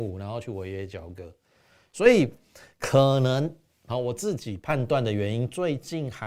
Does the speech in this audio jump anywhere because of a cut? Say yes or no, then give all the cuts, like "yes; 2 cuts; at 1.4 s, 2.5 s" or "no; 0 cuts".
no; 0 cuts